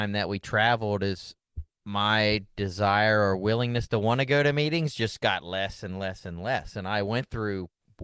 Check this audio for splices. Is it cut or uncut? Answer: uncut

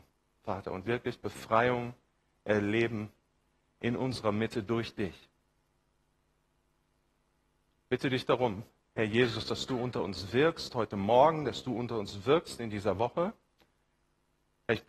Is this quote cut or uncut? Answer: uncut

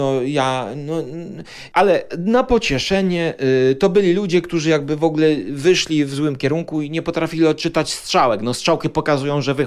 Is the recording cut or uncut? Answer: uncut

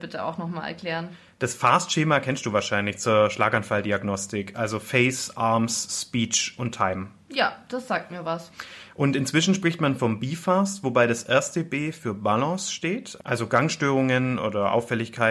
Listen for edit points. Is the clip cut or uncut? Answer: uncut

